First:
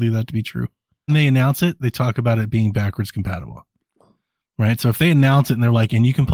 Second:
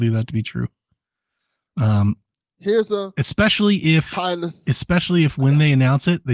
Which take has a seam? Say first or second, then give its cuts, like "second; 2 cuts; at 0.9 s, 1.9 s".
first; 1 cut; at 1.1 s